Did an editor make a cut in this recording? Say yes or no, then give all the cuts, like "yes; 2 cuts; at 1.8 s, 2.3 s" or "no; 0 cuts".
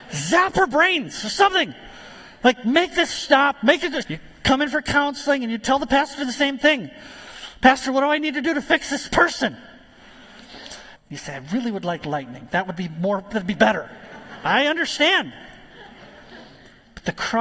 yes; 2 cuts; at 4.0 s, 11.0 s